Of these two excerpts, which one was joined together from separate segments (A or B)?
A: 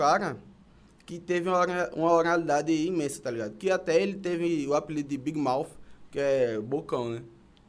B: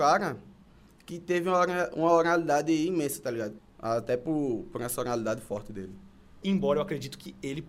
B